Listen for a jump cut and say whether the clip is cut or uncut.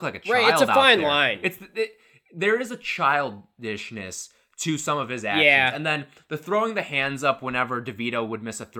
uncut